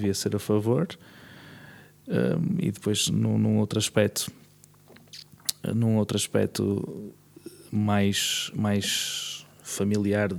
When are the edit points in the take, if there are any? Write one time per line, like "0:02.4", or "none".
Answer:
none